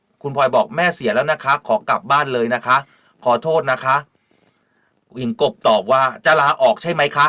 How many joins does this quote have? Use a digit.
1